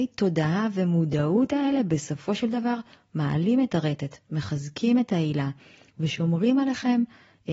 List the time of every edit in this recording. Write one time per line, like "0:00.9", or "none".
none